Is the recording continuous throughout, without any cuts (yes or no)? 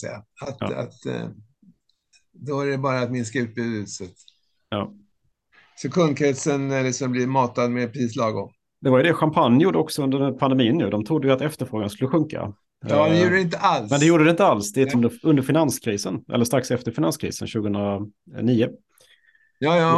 no